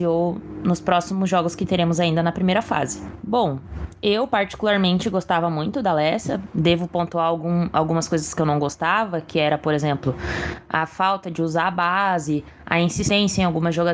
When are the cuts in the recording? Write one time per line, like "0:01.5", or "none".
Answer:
none